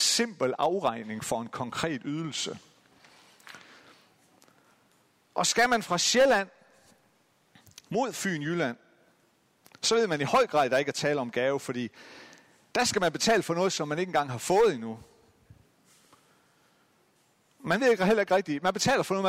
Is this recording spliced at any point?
no; 0 cuts

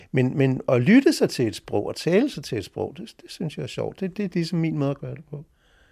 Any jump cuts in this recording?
no; 0 cuts

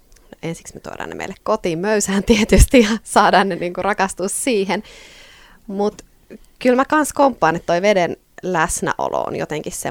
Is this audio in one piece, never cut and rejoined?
yes; 0 cuts

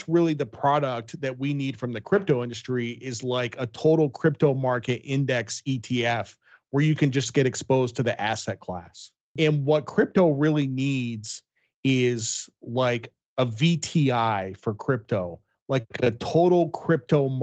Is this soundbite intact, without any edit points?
no; 1 cut; at 9.4 s

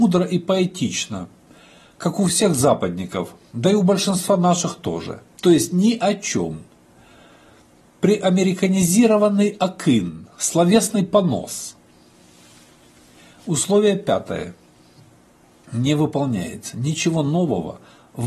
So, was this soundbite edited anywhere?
no; 0 cuts

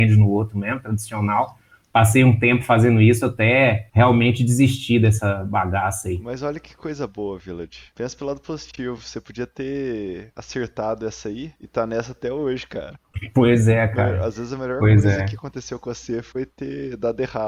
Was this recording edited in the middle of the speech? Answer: no; 0 cuts

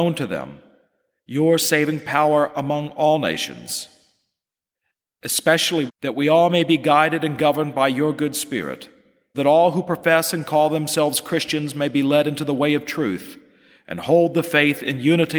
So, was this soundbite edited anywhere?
yes; 2 cuts; at 5.9 s, 9.3 s

